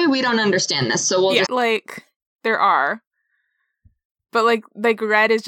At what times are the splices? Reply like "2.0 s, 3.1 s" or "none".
1.4 s